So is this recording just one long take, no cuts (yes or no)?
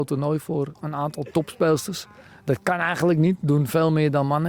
yes